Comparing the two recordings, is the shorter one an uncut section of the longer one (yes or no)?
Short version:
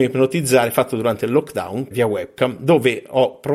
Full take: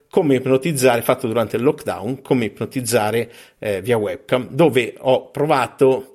no